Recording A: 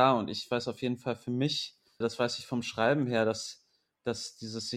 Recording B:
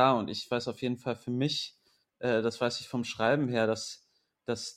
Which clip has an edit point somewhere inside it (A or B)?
A